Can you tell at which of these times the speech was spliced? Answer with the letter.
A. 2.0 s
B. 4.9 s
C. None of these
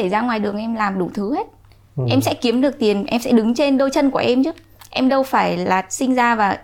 C